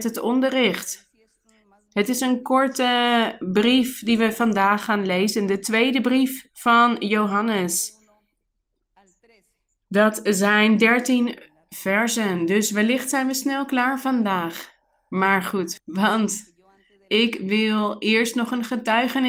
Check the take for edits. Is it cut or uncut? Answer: cut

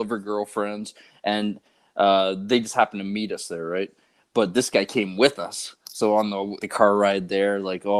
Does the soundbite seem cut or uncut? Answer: cut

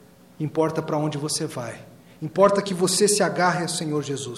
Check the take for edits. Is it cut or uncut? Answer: uncut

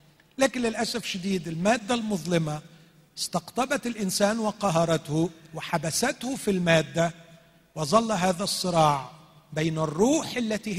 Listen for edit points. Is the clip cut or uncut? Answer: uncut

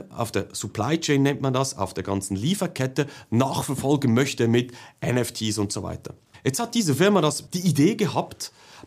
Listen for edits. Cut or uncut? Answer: cut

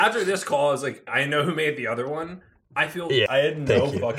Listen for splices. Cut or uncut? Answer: cut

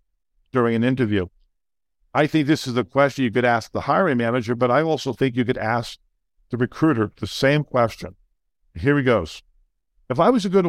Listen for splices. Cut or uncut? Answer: uncut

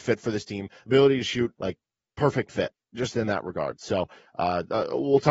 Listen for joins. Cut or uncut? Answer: cut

